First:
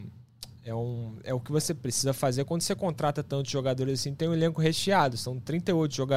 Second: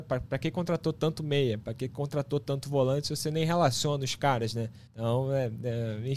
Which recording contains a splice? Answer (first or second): second